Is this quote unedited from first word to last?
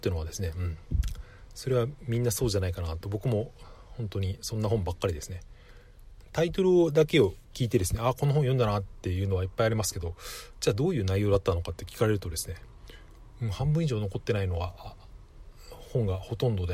no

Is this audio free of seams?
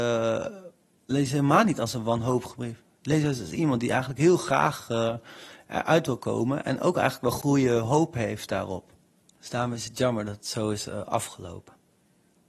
yes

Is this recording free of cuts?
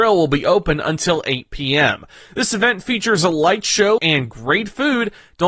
no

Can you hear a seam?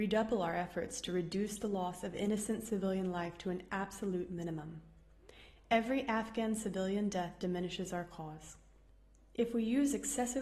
no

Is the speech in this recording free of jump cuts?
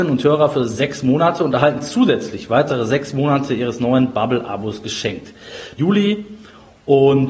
no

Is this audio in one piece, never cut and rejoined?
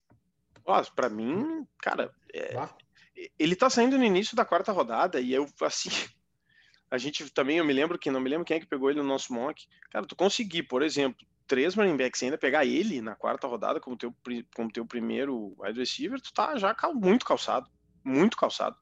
yes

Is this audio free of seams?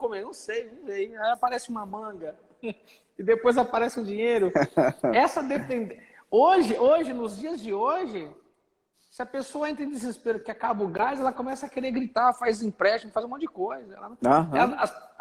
yes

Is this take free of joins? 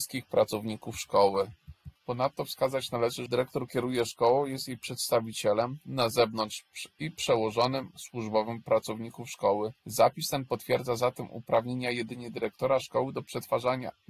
no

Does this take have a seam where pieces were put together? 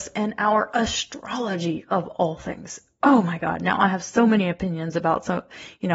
no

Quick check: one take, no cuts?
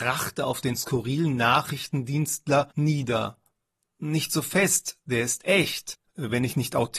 no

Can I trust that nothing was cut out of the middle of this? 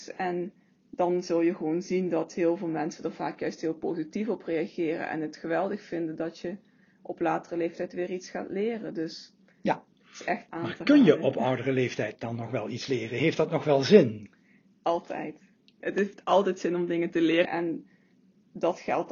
no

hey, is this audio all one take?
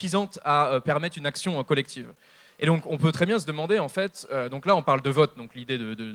yes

